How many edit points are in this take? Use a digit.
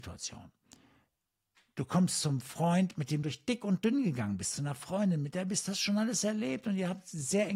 1